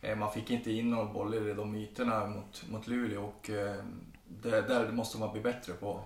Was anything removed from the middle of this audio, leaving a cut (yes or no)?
no